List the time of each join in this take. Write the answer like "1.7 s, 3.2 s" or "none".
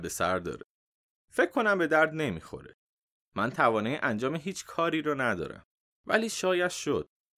none